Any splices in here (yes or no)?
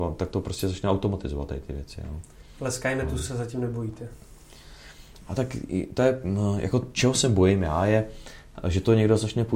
no